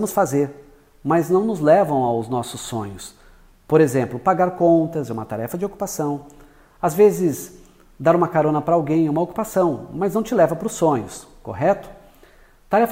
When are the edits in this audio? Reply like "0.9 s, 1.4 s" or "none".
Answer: none